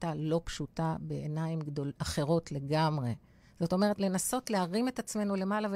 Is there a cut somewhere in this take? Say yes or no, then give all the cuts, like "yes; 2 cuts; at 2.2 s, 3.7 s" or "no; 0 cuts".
yes; 1 cut; at 4.0 s